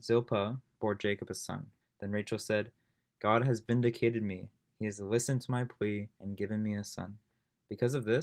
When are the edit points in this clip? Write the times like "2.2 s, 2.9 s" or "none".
1.8 s